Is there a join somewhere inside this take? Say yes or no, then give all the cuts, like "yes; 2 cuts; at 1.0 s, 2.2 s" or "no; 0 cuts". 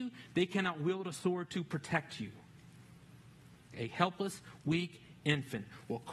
yes; 1 cut; at 3.7 s